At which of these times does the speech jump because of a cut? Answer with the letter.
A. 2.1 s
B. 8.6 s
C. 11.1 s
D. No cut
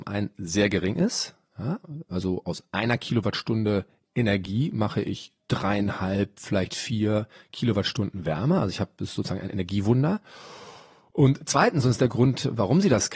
D